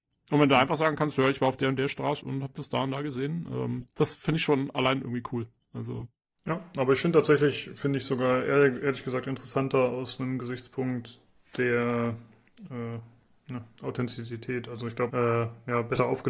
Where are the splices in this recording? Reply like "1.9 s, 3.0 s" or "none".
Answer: 2.2 s, 15.1 s